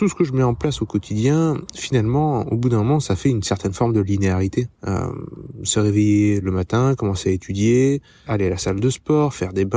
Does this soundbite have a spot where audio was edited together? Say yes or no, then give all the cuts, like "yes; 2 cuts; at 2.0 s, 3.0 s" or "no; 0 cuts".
yes; 2 cuts; at 4.7 s, 8.3 s